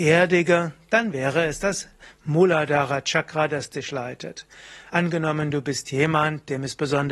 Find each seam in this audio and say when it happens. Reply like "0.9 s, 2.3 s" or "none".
none